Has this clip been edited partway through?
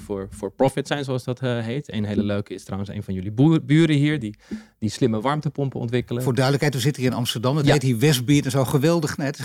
no; 0 cuts

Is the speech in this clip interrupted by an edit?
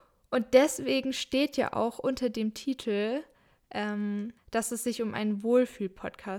yes; 1 cut; at 4.4 s

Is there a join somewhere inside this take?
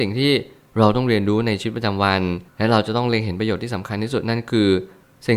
yes; 1 cut; at 2.5 s

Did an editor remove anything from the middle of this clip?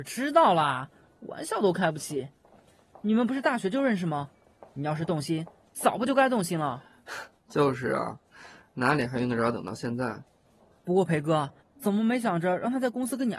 yes; 1 cut; at 11.6 s

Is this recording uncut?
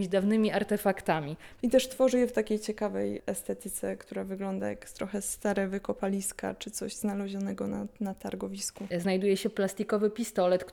no; 2 cuts; at 1.6 s, 8.9 s

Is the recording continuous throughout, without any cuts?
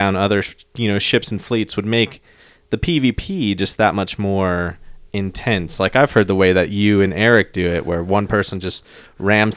yes; 0 cuts

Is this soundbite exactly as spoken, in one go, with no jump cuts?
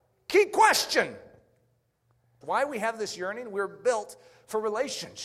no; 1 cut; at 2.4 s

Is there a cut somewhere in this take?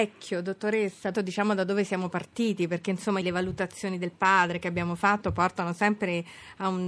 yes; 2 cuts; at 1.1 s, 3.2 s

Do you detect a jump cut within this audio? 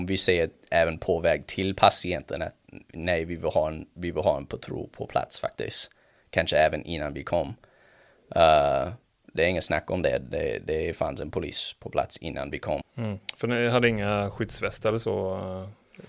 yes; 1 cut; at 12.8 s

